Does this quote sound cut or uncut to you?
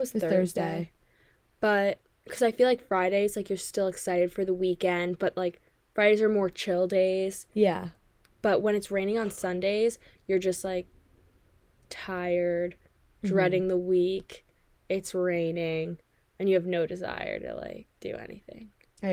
uncut